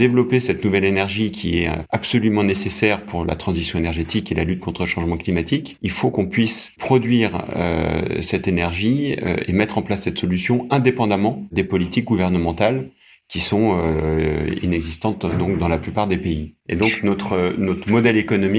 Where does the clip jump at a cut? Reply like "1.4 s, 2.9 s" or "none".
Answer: none